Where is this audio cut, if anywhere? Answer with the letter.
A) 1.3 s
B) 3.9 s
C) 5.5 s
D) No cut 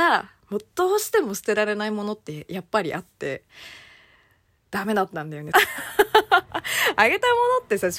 C